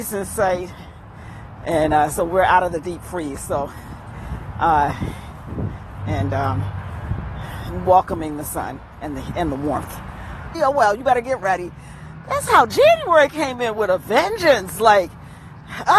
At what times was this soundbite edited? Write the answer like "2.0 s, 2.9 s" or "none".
6.0 s, 10.5 s